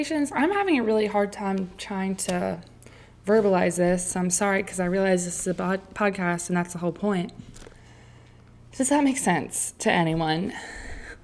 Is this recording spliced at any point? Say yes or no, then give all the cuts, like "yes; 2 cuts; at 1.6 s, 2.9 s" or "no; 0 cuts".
no; 0 cuts